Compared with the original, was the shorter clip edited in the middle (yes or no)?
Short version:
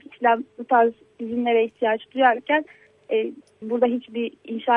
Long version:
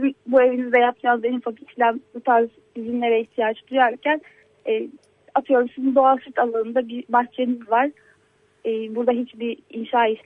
yes